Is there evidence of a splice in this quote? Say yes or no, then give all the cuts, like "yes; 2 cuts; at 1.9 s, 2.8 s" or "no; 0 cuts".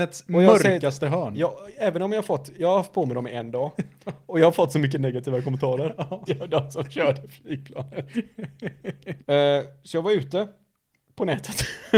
yes; 2 cuts; at 6.3 s, 9.2 s